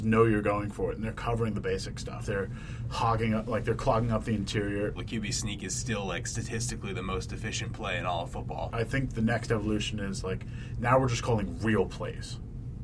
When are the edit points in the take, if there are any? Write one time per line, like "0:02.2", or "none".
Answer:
0:02.2
0:05.0
0:08.7